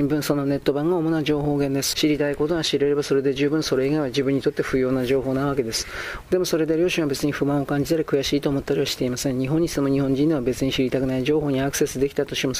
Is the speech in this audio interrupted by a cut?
yes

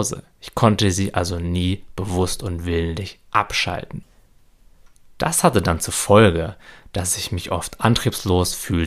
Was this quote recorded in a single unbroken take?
yes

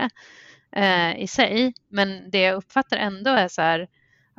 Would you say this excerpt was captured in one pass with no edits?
yes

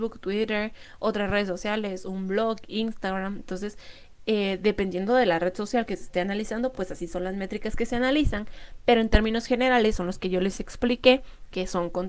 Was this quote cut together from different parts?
no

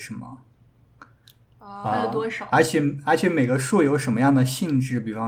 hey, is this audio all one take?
yes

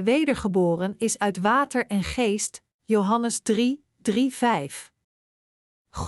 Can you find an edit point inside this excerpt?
no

